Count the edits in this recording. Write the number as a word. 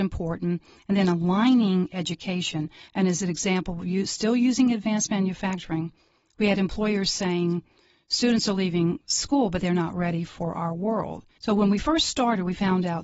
two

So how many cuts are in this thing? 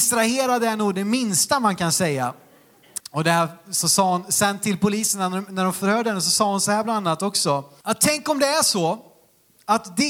two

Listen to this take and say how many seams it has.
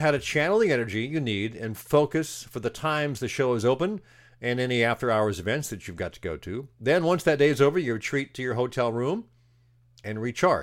zero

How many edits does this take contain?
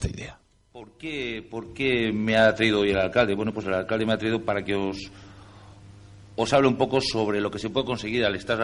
zero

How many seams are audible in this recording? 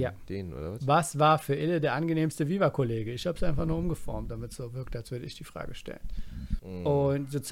one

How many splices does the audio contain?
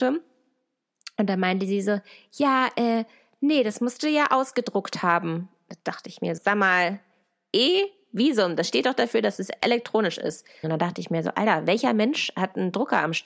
two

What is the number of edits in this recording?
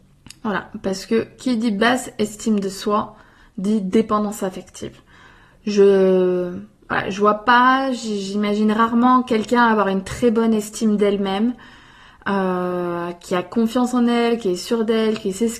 zero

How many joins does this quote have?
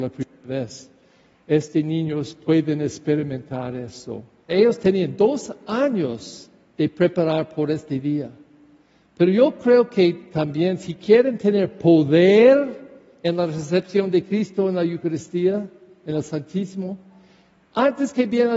one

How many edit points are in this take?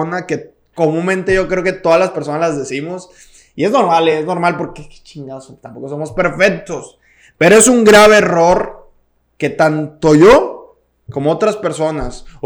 zero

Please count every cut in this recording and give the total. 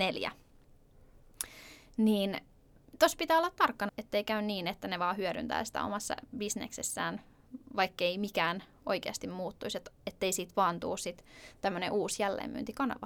one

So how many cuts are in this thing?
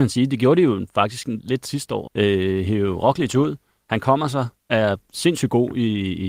two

